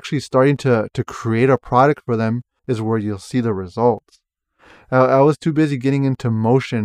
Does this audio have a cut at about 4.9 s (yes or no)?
no